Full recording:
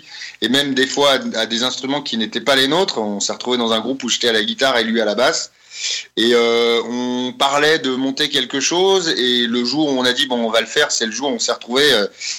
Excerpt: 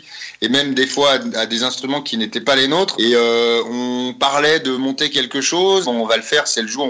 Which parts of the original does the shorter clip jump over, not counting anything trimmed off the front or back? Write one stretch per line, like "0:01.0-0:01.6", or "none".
0:02.9-0:06.1
0:09.0-0:10.3